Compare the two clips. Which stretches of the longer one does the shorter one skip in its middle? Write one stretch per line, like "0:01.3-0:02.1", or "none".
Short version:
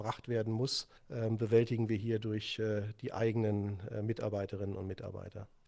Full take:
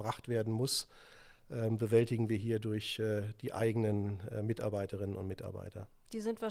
0:01.0-0:01.4

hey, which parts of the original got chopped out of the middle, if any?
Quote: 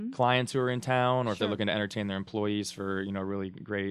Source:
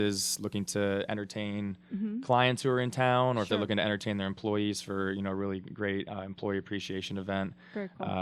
none

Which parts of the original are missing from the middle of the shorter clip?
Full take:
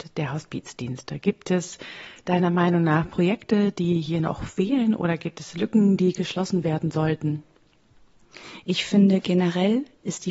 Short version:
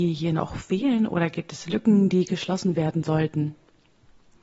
none

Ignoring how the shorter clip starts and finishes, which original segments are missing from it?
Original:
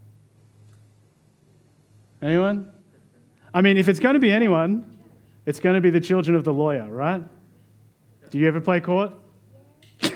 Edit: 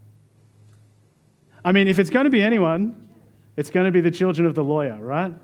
0:01.5-0:03.4

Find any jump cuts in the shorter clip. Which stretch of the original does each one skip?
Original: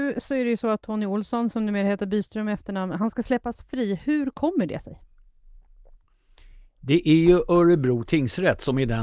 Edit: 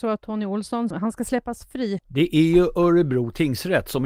0:01.5-0:02.9
0:04.0-0:06.7

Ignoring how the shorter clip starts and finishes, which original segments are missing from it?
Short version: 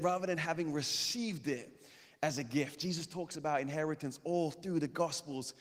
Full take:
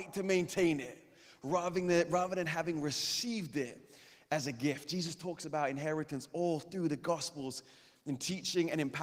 none

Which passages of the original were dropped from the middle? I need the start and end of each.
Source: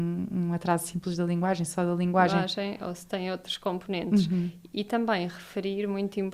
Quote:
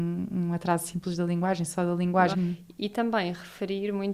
0:02.3-0:04.3

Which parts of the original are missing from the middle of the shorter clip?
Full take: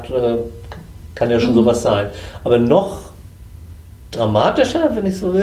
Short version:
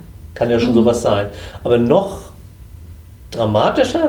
none

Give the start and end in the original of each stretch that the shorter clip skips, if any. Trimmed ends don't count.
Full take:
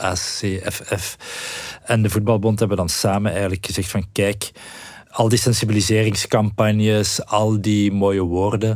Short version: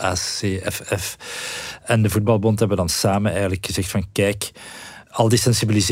none

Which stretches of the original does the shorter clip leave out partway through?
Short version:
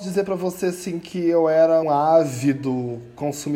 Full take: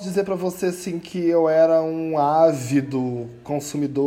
0:01.8-0:02.1

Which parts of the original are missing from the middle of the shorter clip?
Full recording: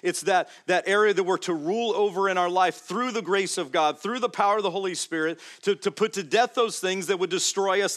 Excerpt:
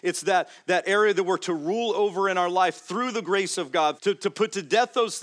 0:04.0-0:05.6

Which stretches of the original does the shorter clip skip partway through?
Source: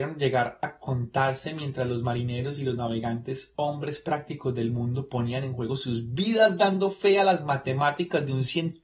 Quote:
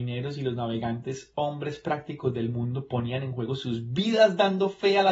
none

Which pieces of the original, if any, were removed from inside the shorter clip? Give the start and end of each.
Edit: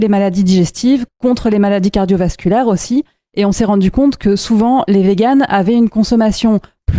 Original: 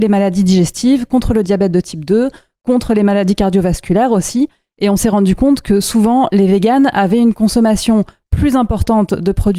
0:01.1-0:02.5

